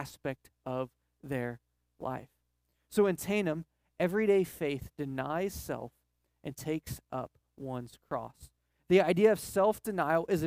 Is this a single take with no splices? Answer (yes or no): yes